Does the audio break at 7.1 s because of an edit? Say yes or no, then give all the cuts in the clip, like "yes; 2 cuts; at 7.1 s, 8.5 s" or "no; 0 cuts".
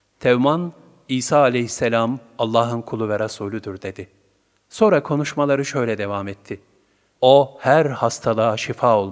yes; 1 cut; at 7.1 s